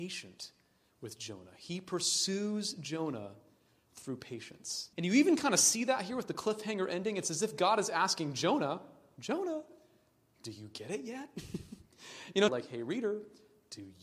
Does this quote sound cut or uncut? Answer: cut